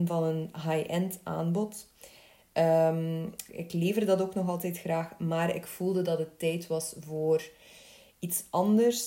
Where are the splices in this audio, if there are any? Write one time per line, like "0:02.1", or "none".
0:02.4
0:03.5

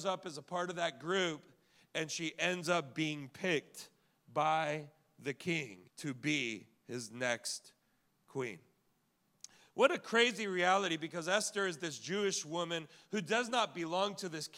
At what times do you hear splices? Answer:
0:05.9

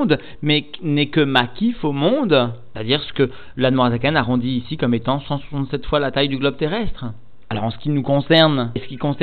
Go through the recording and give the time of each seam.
0:02.7

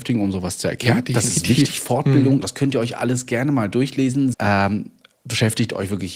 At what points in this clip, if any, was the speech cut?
0:02.4
0:04.3

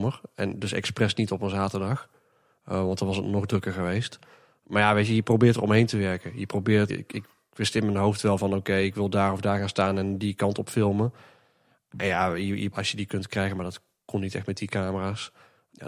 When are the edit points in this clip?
0:06.9
0:12.7

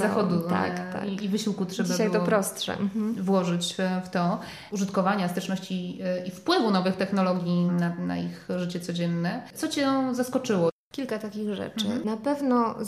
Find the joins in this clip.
0:04.7
0:07.7

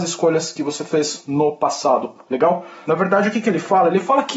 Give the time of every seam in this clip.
0:02.8

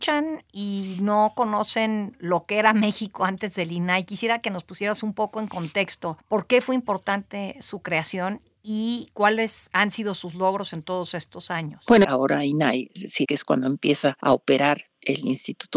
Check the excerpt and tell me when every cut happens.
0:12.0
0:13.2

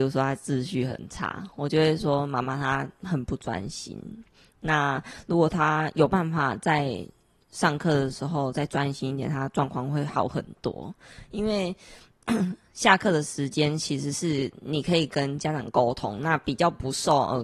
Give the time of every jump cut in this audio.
none

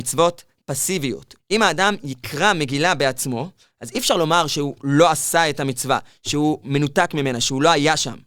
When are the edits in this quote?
0:01.4

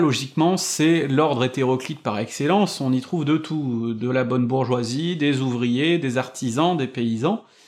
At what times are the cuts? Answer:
none

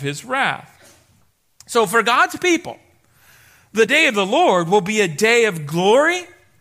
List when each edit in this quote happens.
none

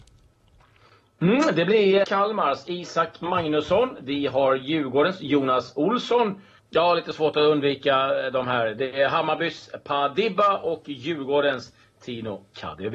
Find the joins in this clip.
0:02.0
0:06.6

